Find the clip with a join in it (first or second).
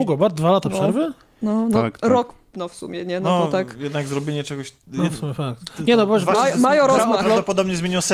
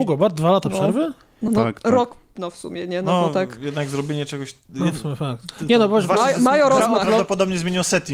second